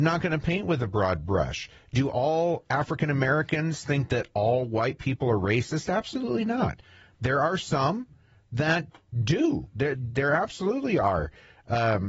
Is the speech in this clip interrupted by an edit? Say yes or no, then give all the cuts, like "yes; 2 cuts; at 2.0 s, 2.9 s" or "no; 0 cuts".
yes; 1 cut; at 9.9 s